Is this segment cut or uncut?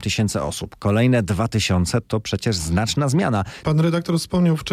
cut